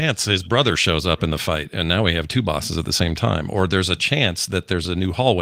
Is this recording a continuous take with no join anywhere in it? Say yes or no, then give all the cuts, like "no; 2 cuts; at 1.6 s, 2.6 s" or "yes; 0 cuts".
yes; 0 cuts